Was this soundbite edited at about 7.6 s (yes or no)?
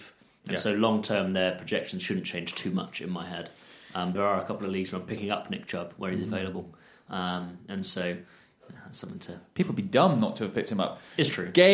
no